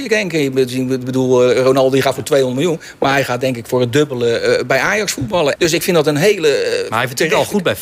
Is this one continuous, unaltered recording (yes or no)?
no